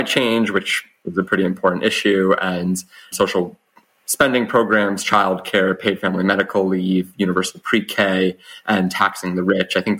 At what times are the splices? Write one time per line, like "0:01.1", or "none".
0:03.1